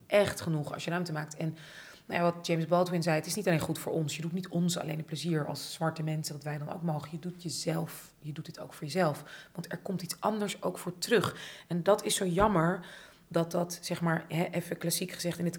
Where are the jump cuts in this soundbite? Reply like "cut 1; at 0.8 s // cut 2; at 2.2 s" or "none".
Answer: none